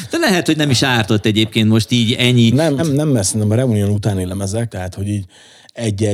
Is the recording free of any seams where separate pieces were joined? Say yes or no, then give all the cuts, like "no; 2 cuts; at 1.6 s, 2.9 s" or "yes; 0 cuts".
no; 2 cuts; at 2.8 s, 4.7 s